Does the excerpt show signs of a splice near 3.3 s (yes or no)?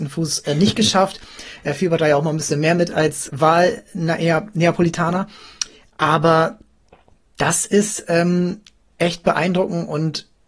yes